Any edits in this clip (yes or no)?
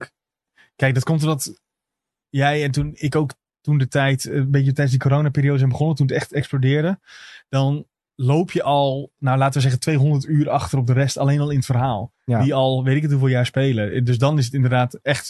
no